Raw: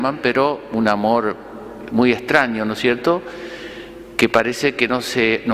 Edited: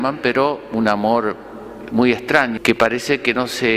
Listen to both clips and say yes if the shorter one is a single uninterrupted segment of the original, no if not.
no